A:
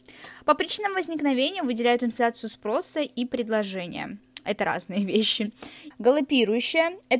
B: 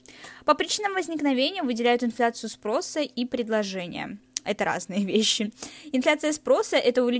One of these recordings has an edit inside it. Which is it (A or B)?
A